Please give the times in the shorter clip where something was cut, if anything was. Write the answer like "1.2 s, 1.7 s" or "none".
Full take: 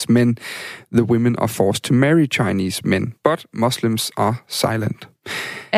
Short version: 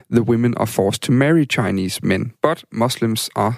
none

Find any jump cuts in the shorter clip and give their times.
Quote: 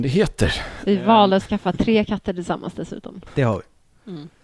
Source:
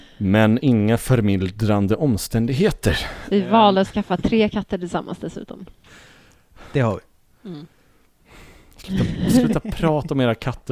3.3 s

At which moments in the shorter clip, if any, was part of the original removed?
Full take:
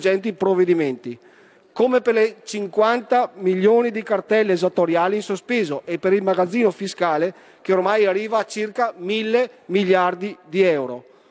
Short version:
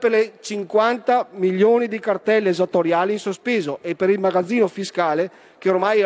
none

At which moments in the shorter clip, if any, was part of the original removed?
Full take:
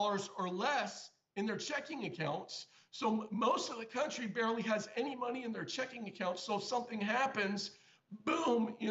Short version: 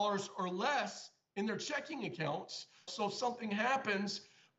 2.9 s

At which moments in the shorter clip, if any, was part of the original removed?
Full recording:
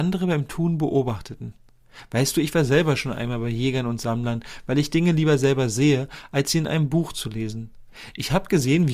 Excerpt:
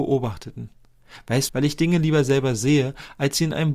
1.5 s

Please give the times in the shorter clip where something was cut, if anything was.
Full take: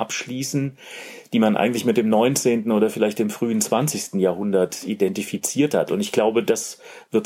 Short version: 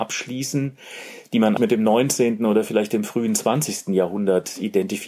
1.6 s

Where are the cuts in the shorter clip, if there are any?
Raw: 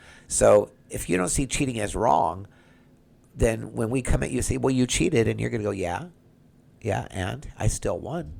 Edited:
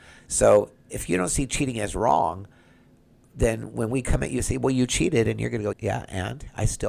5.7 s

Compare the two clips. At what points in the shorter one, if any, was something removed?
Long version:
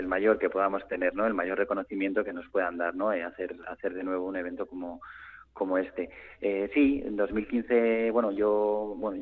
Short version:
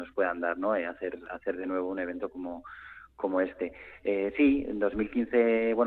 none

